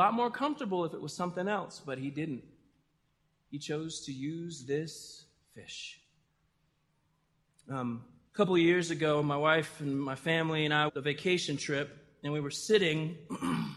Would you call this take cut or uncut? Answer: cut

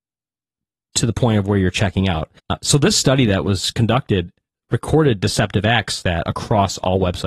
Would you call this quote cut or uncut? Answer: cut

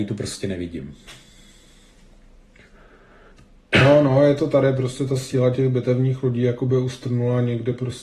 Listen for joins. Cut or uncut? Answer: uncut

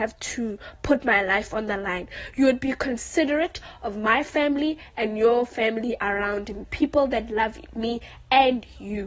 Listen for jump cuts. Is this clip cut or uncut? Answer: uncut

